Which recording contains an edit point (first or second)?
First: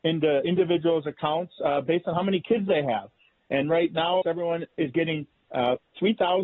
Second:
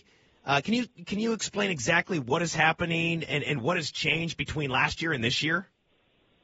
first